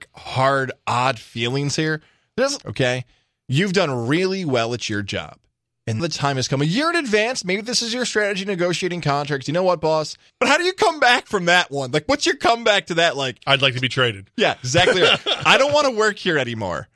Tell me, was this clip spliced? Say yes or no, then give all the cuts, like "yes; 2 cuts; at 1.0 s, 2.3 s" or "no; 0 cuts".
yes; 3 cuts; at 2.6 s, 6.0 s, 10.3 s